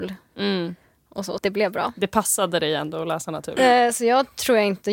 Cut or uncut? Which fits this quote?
cut